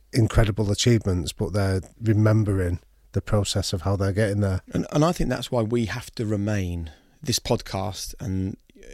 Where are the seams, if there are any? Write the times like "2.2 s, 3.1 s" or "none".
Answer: none

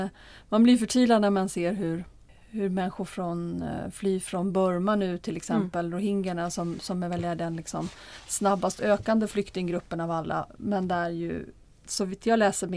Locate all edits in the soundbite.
none

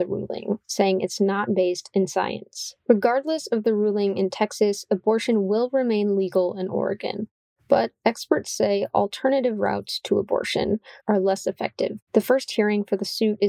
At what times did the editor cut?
11.0 s, 12.1 s

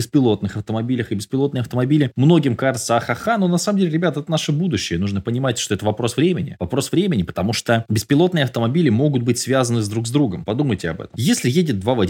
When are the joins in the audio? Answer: none

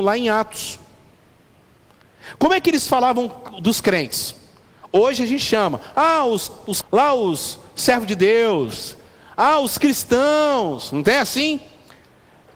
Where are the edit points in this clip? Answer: 6.8 s

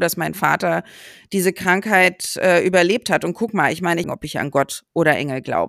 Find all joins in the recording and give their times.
4.0 s

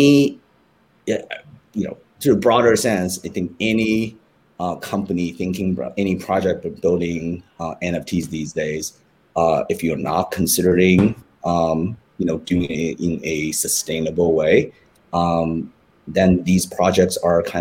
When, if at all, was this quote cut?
none

